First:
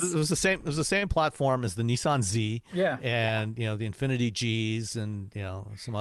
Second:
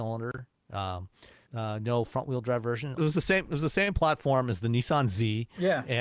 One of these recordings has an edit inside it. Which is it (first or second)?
second